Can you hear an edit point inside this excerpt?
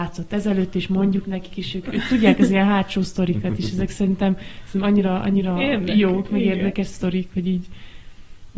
no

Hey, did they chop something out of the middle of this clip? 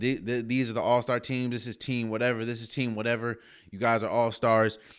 no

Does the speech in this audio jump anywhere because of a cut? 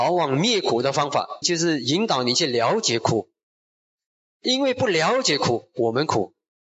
yes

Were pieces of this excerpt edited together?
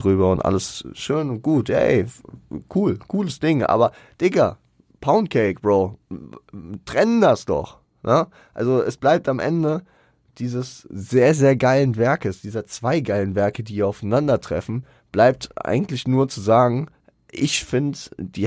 no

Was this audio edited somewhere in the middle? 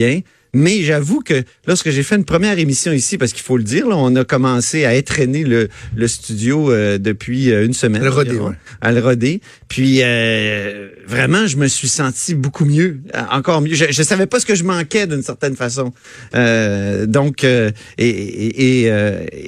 no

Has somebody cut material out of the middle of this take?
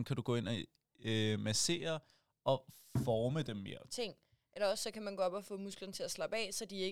yes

